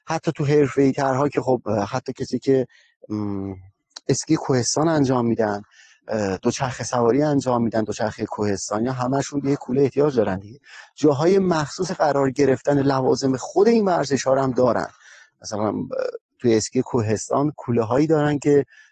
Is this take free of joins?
yes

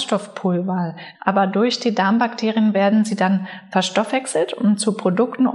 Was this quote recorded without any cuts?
no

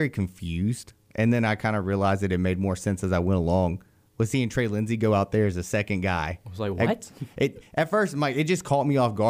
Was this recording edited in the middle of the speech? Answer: no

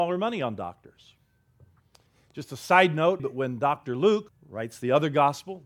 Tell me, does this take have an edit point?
yes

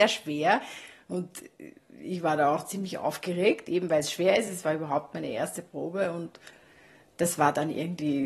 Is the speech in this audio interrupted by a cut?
no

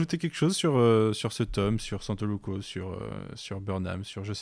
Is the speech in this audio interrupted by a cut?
no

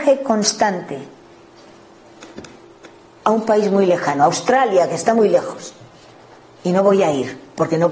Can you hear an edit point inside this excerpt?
yes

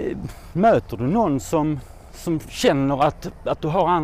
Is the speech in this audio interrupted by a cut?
no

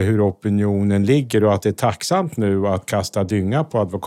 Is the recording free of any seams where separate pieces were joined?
yes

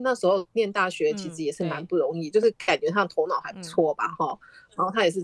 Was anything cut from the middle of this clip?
no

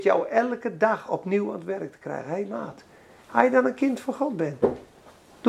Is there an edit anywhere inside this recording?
no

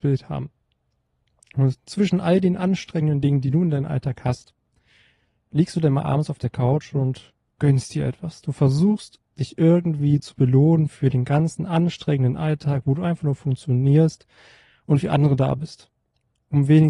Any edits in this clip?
no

